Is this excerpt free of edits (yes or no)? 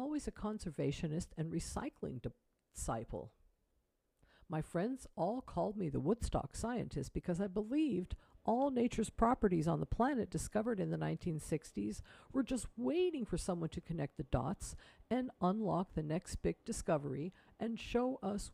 yes